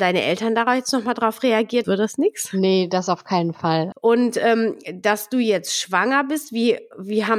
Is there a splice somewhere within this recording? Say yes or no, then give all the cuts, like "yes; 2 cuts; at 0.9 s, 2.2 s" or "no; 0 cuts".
yes; 2 cuts; at 1.8 s, 3.9 s